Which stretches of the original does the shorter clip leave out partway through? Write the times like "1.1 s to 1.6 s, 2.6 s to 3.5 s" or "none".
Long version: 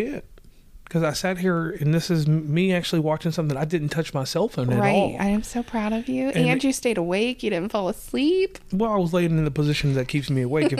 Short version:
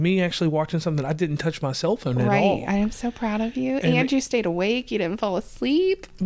none